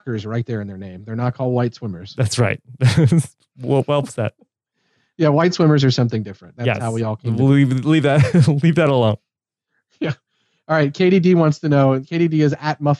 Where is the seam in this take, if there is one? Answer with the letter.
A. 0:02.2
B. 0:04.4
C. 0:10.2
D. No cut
D